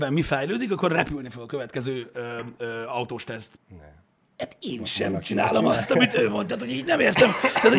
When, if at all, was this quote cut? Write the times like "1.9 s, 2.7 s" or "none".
3.6 s